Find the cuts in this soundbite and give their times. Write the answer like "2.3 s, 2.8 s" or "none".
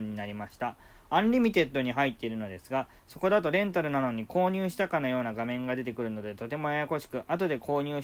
none